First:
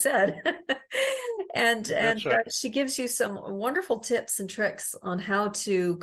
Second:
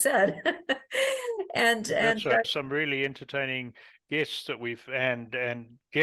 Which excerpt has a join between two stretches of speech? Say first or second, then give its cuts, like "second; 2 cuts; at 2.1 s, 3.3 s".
second; 1 cut; at 2.4 s